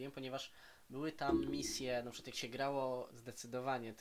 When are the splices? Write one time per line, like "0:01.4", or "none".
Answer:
0:03.1

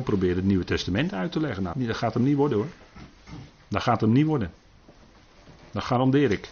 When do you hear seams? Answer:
0:01.7

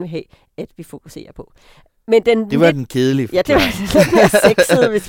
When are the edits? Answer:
none

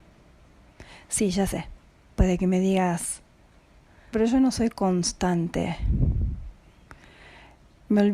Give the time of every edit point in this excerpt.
0:04.1

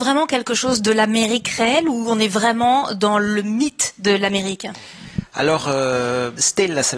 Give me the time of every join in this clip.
none

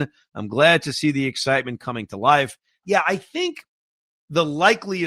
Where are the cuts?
0:02.8

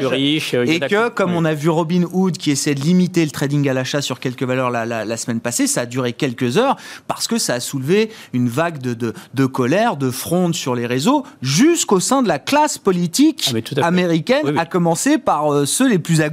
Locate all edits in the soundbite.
none

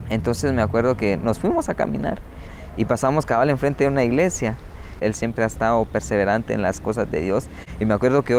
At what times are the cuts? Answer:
0:05.0

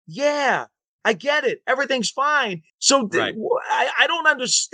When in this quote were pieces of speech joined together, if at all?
0:02.7

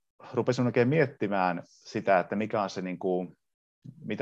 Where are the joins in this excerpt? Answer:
none

